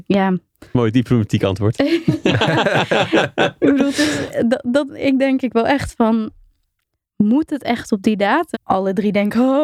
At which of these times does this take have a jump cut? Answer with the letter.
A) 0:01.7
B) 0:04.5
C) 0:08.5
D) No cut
C